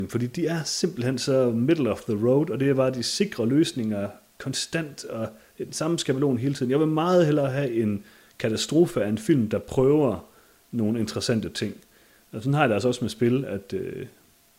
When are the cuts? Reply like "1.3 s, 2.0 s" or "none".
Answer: none

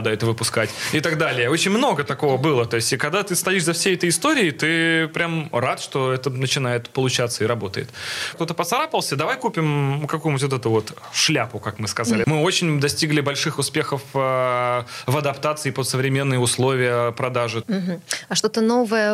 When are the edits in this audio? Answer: 8.3 s, 12.2 s, 17.6 s

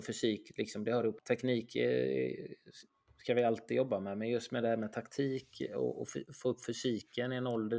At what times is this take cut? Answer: 1.2 s

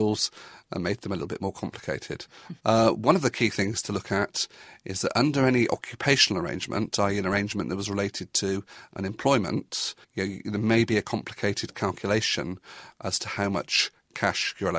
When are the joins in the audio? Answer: 2.6 s, 10.0 s

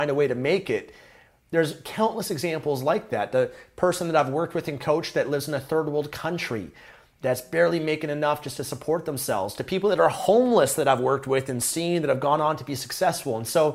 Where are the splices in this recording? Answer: none

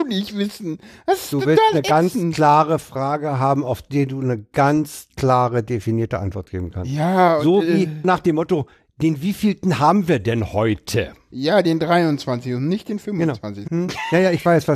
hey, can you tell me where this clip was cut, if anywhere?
8.0 s, 13.7 s

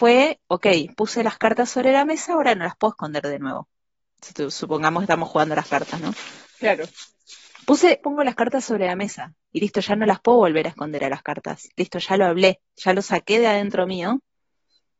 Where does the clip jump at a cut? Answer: 6.5 s, 8.0 s

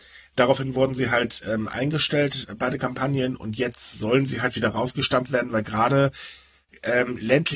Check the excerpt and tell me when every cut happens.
none

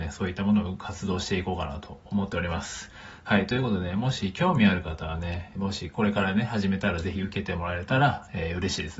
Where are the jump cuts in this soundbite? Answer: 5.5 s

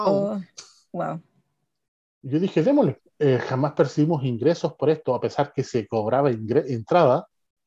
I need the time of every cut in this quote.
3.0 s

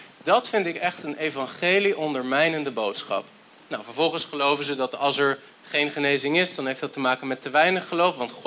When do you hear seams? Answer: 3.7 s

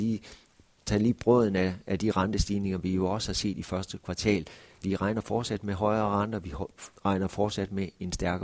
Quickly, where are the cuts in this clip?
4.8 s, 7.0 s

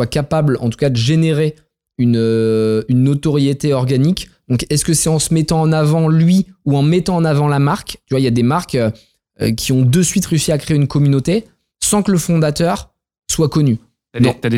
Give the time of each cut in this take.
none

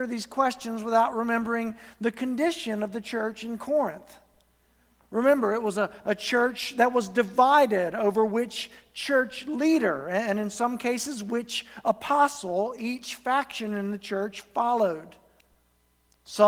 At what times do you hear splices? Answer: none

